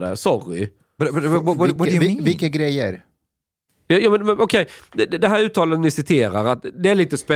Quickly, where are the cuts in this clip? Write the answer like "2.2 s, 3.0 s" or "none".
none